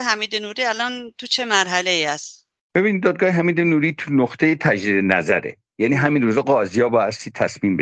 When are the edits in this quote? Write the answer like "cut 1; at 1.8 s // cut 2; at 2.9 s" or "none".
none